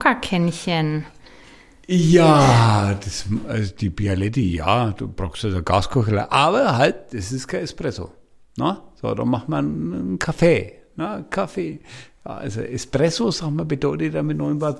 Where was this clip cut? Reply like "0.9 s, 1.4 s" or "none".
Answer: none